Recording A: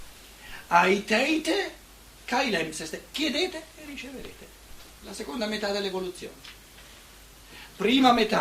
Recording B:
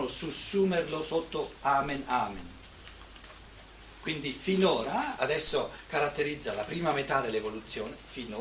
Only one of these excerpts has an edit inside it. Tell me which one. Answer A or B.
B